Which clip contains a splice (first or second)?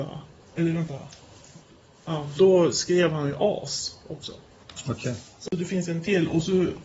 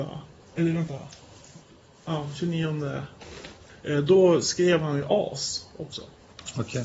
first